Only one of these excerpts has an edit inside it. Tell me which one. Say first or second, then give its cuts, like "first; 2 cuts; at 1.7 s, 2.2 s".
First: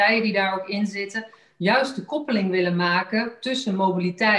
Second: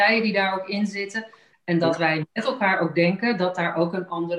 second; 1 cut; at 1.5 s